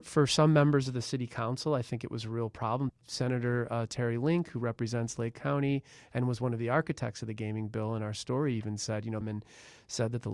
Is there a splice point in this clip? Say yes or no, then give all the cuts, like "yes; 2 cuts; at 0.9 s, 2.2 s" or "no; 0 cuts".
yes; 2 cuts; at 2.9 s, 9.2 s